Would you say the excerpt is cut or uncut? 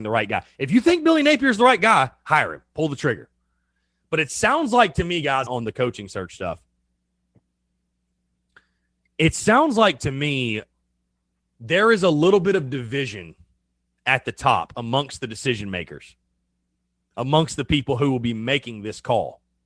cut